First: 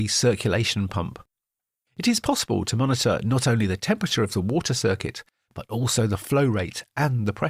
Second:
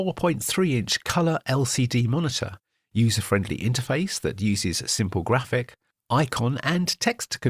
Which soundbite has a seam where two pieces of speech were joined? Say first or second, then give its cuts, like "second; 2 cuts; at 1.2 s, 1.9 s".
first; 1 cut; at 1.9 s